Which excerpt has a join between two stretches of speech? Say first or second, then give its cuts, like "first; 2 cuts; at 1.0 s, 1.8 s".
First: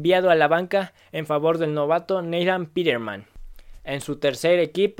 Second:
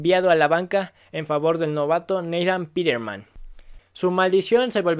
second; 1 cut; at 3.8 s